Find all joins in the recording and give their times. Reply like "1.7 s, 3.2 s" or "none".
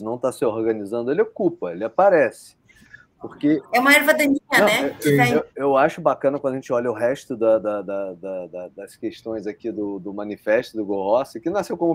none